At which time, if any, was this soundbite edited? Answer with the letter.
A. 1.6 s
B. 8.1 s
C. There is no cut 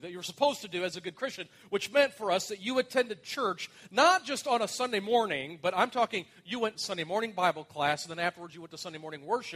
C